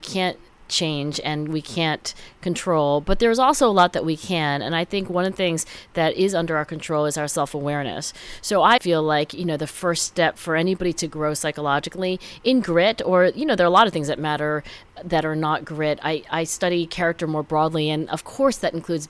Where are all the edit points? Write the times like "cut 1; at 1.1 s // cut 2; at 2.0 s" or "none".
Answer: cut 1; at 8.8 s